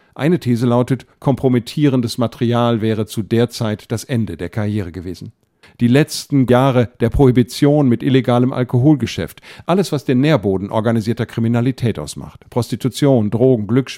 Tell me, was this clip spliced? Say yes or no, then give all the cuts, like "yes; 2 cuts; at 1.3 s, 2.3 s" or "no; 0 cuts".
yes; 2 cuts; at 1.1 s, 5.6 s